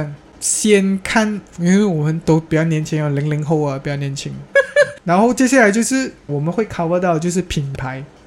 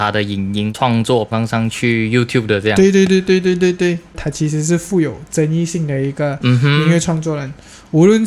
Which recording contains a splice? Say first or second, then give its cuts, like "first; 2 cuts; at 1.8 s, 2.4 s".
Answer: first; 2 cuts; at 1.5 s, 4.5 s